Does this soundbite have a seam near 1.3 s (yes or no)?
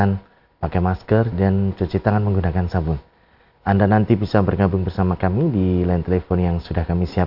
yes